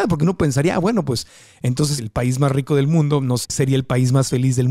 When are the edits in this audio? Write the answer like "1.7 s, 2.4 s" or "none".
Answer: 2.0 s, 3.4 s